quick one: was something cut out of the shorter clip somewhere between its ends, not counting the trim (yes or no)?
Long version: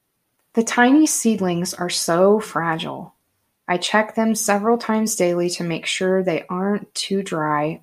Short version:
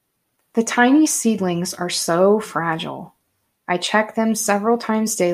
no